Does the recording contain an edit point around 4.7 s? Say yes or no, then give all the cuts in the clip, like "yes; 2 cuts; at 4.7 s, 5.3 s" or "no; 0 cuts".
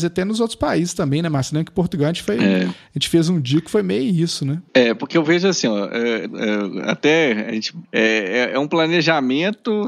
yes; 3 cuts; at 4.7 s, 6.3 s, 7.8 s